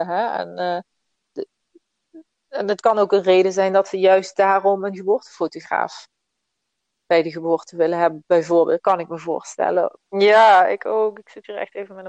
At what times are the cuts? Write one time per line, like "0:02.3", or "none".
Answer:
0:09.9